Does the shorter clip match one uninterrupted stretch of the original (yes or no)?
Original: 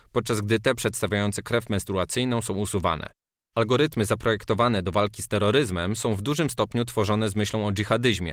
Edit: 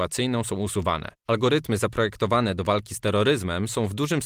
no